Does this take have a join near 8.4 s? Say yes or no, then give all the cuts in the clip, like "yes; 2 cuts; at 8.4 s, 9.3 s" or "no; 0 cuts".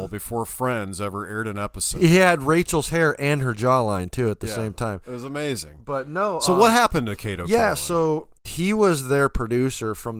yes; 1 cut; at 8.4 s